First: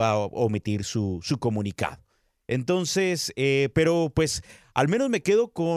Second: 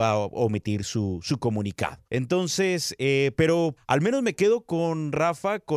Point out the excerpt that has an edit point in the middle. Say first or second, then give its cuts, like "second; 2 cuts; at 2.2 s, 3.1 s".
second; 2 cuts; at 2.1 s, 3.8 s